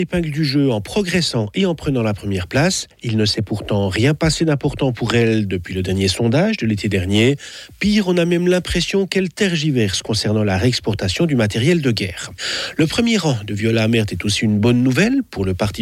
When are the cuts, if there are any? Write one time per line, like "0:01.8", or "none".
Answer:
none